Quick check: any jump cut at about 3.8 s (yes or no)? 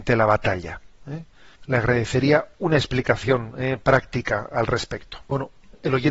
no